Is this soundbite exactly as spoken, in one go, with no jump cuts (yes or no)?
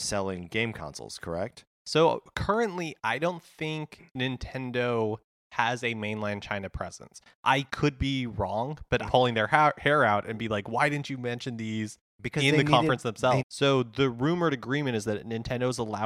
no